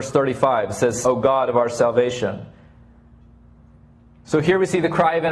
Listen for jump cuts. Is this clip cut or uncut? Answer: cut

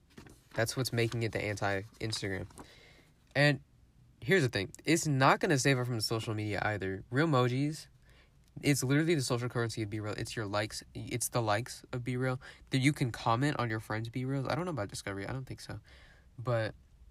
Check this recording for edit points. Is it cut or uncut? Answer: uncut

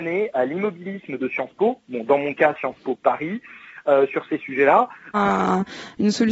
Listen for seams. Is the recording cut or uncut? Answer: cut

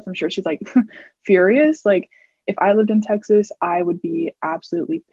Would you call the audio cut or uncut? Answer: uncut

